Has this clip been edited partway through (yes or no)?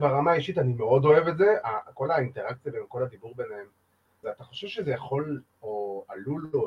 yes